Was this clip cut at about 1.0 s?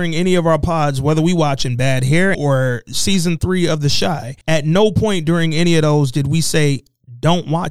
no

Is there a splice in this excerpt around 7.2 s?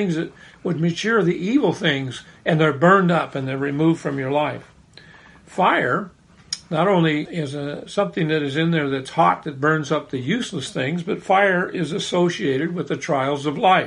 yes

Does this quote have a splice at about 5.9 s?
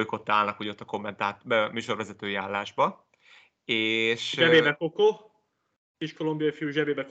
yes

